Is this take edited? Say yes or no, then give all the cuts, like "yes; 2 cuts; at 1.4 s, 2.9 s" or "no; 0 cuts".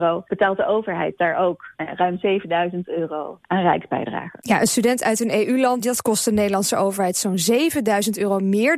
yes; 1 cut; at 5.8 s